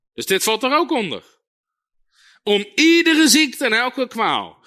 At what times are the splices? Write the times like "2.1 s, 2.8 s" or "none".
none